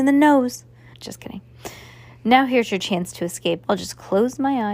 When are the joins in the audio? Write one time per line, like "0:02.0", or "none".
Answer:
0:00.9
0:03.6